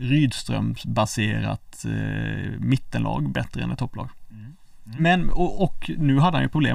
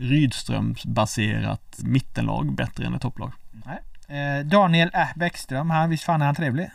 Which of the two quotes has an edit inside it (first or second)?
second